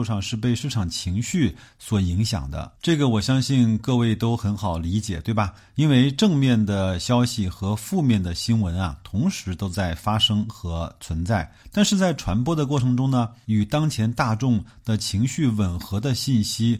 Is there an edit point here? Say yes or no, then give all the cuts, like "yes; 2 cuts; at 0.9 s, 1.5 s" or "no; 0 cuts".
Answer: no; 0 cuts